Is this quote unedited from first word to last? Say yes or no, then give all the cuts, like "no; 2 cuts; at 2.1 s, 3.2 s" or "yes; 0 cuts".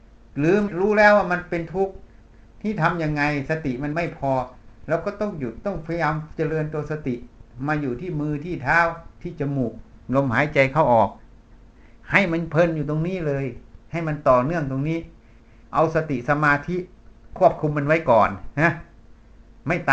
yes; 0 cuts